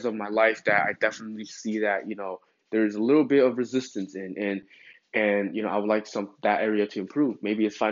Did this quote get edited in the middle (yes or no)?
no